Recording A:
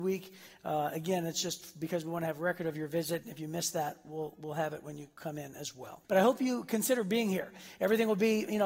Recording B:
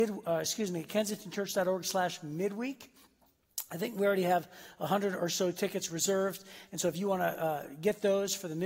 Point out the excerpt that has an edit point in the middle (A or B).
A